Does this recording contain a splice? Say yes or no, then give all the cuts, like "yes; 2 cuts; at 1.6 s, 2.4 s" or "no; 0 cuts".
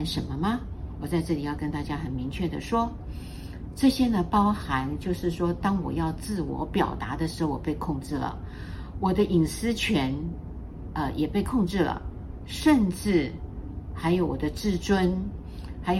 no; 0 cuts